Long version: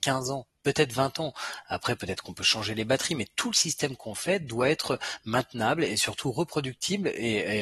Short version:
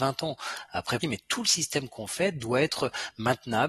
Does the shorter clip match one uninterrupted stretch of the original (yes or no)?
no